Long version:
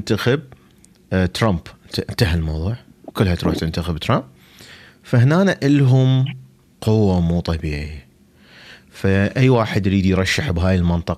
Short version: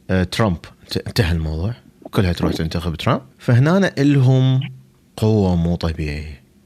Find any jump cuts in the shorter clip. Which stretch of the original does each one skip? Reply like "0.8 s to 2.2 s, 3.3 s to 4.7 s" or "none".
4.3 s to 5.0 s